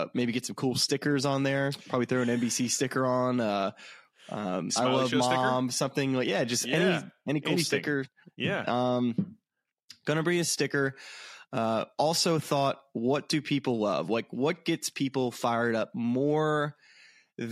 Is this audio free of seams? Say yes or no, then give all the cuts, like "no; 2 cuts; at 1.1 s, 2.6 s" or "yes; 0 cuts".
no; 1 cut; at 4.7 s